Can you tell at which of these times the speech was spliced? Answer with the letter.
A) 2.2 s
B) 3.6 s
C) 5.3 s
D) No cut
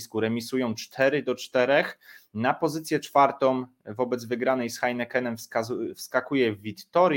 D